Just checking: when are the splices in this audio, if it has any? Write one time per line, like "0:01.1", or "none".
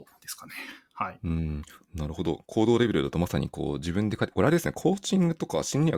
none

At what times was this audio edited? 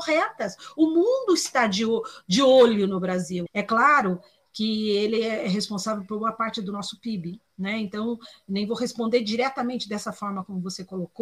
0:03.5

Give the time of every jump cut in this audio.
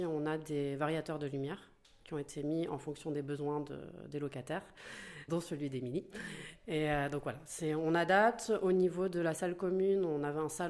0:05.3

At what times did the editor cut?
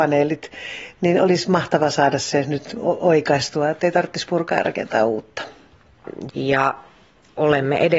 0:06.3

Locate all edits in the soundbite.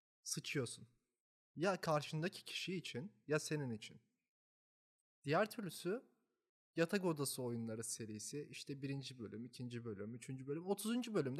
0:05.0

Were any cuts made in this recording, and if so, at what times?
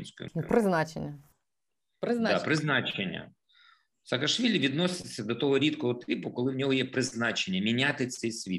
none

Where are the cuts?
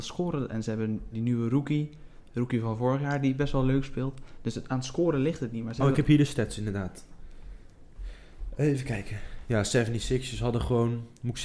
0:01.1

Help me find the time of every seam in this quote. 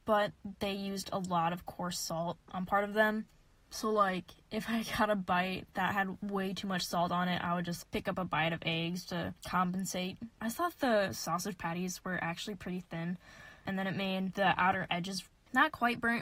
0:09.0
0:10.3

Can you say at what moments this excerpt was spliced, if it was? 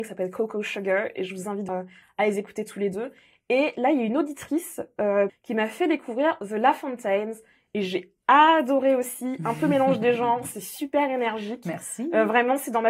0:01.7
0:05.3

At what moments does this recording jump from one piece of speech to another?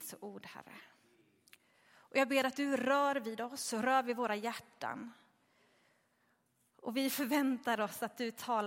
none

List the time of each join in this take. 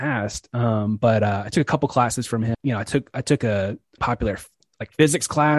0:02.5
0:04.0

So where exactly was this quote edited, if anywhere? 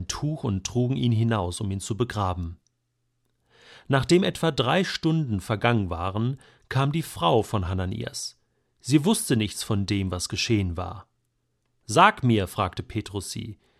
none

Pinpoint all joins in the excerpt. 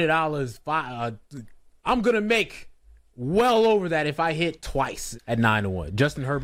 0:01.8
0:05.2

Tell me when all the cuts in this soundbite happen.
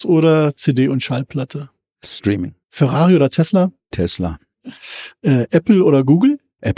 0:02.6

